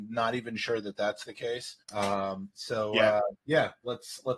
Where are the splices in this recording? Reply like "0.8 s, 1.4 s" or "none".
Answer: 1.8 s